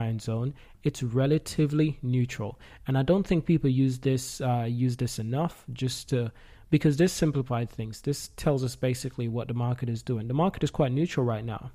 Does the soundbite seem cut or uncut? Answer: uncut